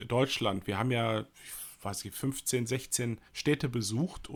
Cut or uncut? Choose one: cut